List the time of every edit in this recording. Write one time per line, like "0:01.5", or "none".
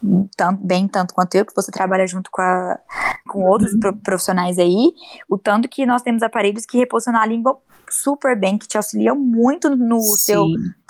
0:03.3